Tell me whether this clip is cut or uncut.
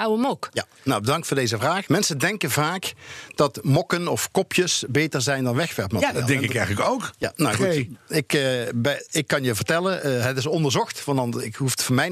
cut